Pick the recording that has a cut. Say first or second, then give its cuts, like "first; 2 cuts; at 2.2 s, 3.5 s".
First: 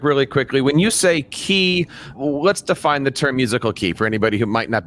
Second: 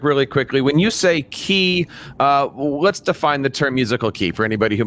first; 1 cut; at 2.1 s